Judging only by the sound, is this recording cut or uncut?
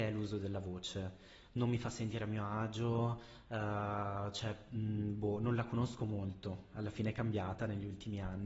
uncut